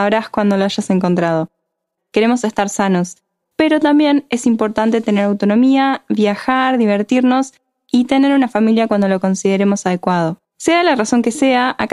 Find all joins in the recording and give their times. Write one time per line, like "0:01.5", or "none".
0:02.0
0:03.4
0:10.4

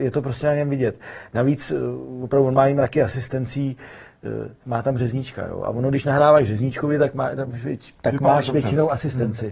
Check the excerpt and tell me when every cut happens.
0:04.6
0:07.5

